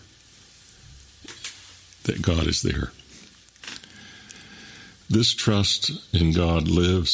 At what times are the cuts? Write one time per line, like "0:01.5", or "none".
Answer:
0:05.0